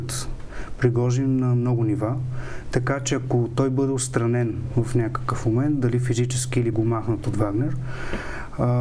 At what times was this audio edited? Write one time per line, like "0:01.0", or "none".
0:06.7